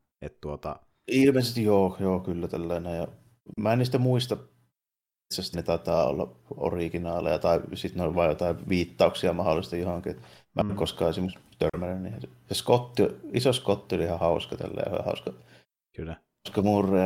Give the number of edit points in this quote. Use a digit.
1